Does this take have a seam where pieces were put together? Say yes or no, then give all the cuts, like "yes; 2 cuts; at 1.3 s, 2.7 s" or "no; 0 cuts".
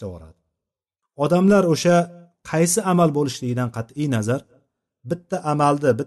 no; 0 cuts